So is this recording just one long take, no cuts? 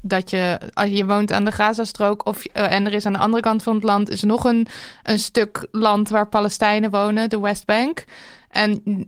yes; 0 cuts

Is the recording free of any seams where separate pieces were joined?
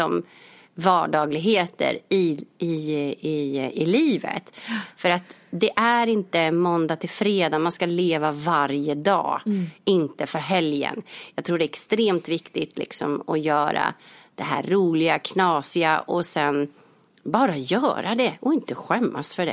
yes; 0 cuts

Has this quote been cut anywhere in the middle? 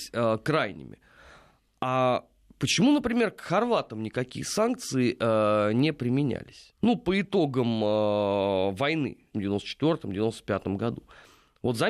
yes; 2 cuts; at 6.8 s, 9.3 s

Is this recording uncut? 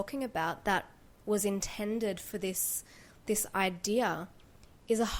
yes; 0 cuts

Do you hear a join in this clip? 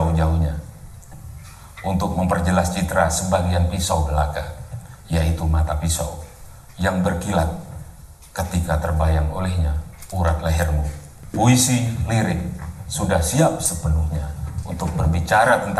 no; 0 cuts

